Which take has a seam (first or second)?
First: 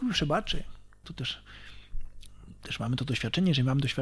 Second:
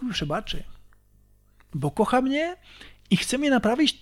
first